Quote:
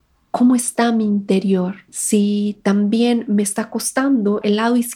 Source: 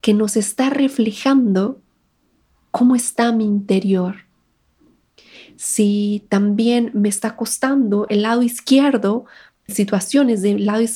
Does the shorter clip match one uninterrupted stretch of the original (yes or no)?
no